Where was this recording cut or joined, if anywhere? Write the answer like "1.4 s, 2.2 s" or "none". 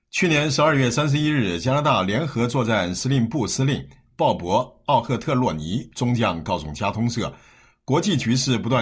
none